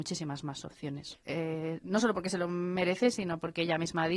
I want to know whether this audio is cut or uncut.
cut